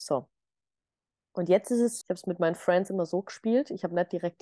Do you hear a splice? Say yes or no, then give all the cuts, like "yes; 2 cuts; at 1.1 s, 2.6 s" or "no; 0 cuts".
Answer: yes; 1 cut; at 2.0 s